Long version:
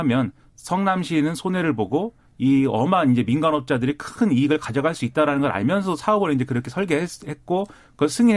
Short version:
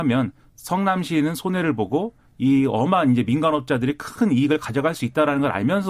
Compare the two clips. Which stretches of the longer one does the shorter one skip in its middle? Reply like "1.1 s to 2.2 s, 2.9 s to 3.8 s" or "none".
none